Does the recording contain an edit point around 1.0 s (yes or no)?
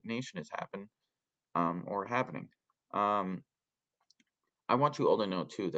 no